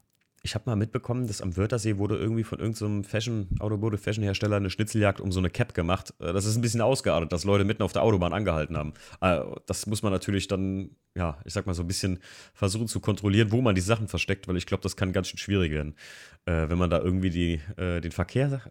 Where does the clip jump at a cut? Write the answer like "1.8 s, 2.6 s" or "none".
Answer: none